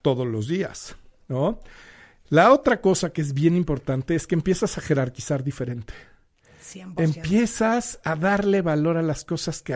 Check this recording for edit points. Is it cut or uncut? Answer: uncut